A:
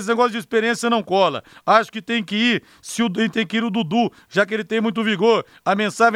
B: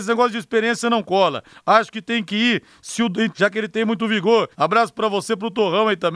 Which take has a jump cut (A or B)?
B